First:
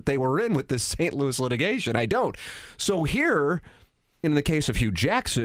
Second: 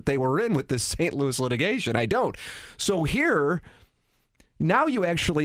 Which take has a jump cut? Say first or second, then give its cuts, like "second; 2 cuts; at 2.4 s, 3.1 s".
first; 1 cut; at 4.2 s